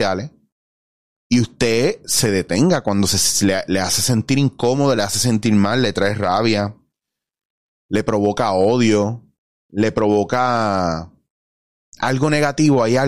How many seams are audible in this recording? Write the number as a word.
zero